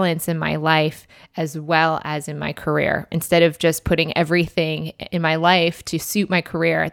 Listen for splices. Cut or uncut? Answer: uncut